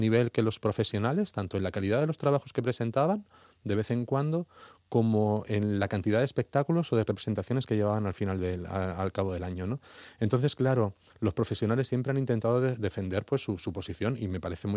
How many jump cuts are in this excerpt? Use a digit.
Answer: 0